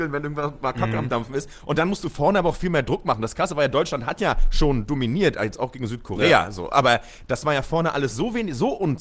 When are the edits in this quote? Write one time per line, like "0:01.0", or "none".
none